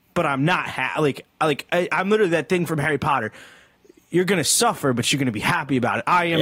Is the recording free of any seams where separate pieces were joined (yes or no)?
yes